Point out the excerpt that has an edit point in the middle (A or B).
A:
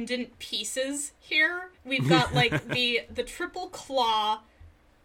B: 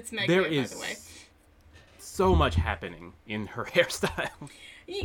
A